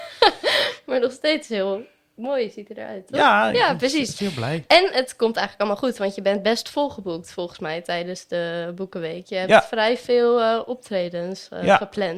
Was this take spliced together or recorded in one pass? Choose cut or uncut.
uncut